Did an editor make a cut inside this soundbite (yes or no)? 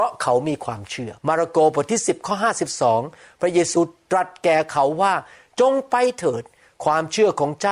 yes